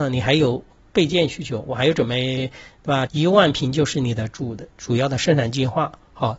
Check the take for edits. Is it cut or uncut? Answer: cut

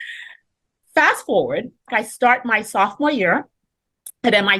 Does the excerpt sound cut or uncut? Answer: cut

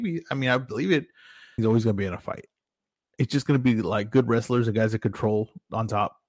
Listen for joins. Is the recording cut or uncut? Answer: cut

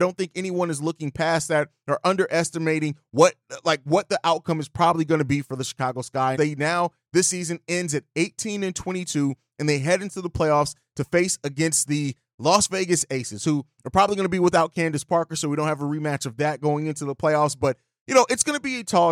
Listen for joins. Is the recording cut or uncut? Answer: cut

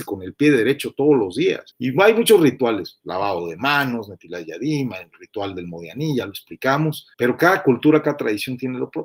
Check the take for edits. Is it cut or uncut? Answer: cut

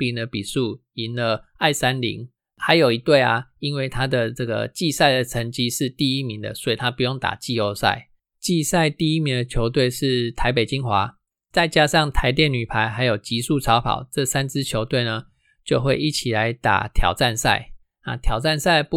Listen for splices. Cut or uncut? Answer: uncut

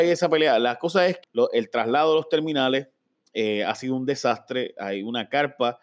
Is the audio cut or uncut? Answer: cut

